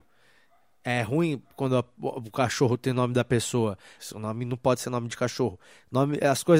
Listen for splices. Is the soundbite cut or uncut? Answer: cut